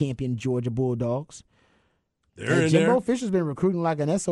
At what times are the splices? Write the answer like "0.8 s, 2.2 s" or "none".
2.3 s

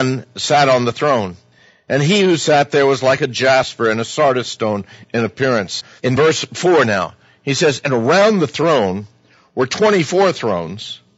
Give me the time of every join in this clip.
6.0 s

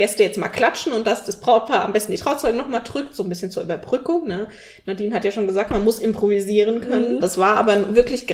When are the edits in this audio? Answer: 7.2 s

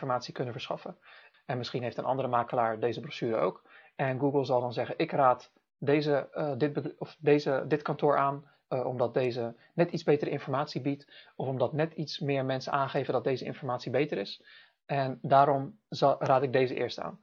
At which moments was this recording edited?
1.3 s

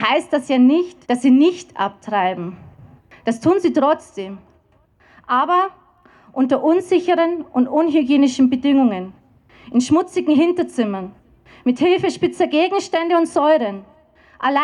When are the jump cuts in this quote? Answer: 1.0 s

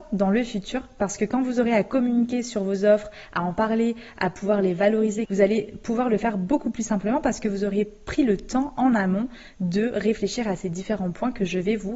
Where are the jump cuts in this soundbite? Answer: 5.2 s

